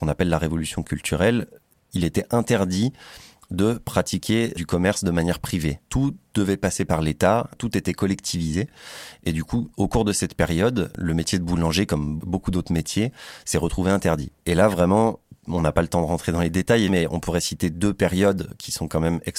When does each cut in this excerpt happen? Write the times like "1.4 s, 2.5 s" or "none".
14.4 s, 16.9 s